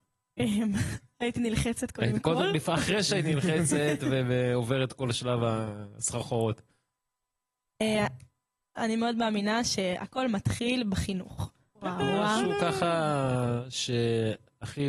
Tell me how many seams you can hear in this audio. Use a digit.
2